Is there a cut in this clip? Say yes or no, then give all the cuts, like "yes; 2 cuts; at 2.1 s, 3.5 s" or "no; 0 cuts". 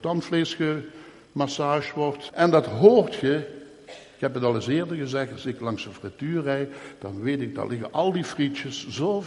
yes; 1 cut; at 2.3 s